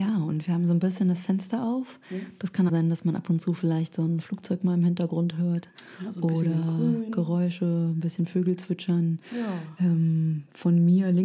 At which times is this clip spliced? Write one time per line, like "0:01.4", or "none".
0:02.7